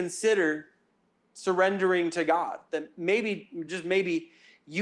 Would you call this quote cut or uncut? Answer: uncut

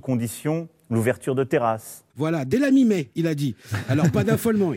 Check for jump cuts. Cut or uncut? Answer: cut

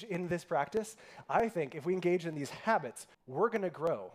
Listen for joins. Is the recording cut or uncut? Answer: cut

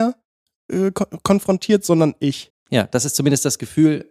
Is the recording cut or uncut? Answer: cut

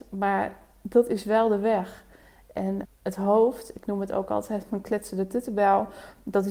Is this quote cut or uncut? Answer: cut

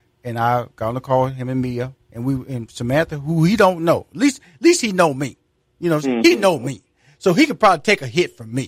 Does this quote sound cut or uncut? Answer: cut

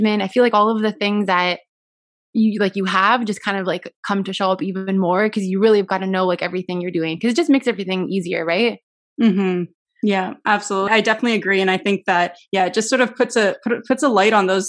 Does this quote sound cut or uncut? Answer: cut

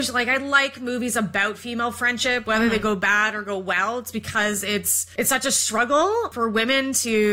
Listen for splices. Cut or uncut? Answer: cut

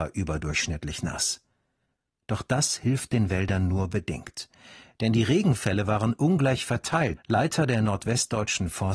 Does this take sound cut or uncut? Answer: cut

